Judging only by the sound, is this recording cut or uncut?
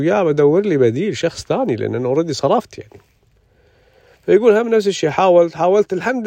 uncut